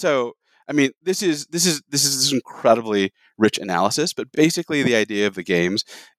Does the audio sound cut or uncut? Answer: uncut